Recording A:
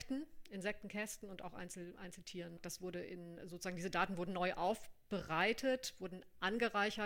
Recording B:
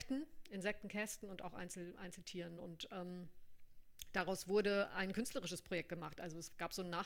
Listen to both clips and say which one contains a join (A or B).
A